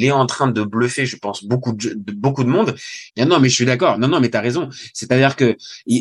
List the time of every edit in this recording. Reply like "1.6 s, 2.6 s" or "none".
3.1 s